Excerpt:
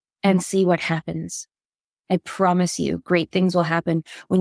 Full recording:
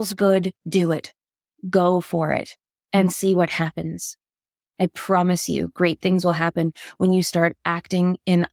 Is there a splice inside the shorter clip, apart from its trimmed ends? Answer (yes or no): no